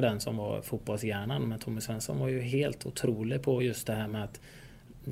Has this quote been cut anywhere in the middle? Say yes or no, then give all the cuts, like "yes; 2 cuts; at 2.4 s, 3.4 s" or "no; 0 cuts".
no; 0 cuts